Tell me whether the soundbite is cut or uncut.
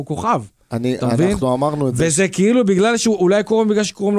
uncut